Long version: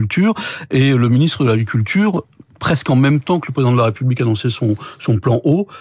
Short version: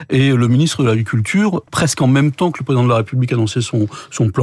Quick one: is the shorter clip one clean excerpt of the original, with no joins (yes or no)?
no